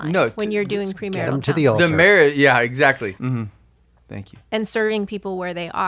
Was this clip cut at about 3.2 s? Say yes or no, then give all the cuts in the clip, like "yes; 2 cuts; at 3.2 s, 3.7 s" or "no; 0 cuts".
yes; 1 cut; at 3.2 s